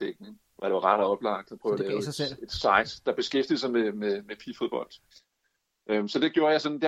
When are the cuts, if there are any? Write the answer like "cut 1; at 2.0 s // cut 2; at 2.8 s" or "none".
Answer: none